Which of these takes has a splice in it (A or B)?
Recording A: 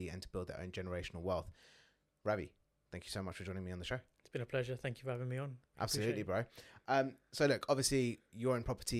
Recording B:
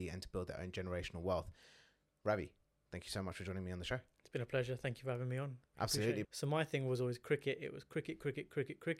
B